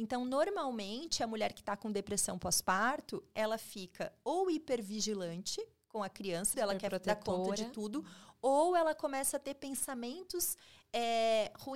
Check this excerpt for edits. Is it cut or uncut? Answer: cut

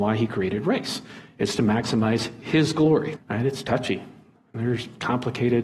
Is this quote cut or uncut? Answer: cut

